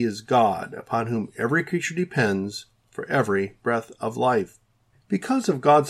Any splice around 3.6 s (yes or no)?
no